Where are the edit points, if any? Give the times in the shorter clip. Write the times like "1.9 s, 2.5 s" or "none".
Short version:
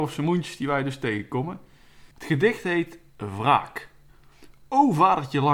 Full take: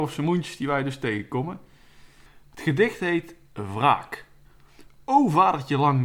2.1 s